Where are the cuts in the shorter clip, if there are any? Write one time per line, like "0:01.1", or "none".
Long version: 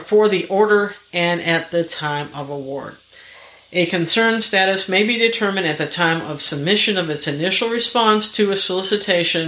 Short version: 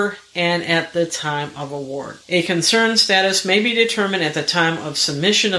0:02.2